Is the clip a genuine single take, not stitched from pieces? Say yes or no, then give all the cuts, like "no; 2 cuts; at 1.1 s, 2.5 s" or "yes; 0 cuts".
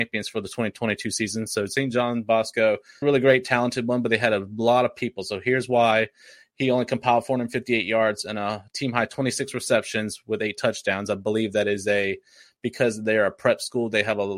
no; 1 cut; at 3.0 s